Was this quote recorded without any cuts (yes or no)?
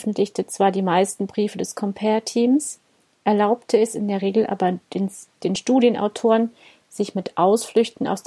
yes